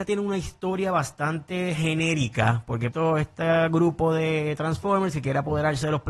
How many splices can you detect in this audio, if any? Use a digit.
1